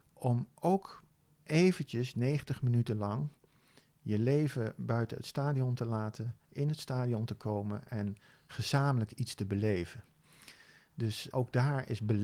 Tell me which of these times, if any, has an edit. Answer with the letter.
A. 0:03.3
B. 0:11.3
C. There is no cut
B